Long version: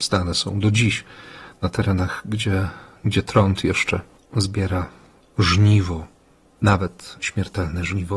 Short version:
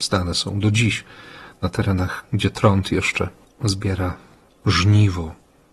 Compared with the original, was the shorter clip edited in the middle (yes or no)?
yes